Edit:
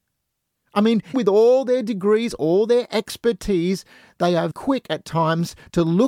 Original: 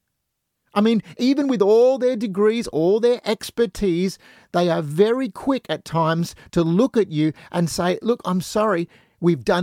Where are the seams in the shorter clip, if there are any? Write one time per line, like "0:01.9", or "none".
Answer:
0:01.1
0:04.5